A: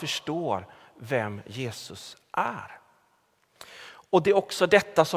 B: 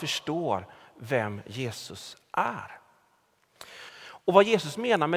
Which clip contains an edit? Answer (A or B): B